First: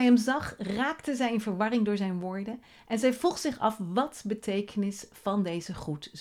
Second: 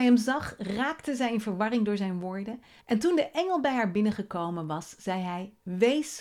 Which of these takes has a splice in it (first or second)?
second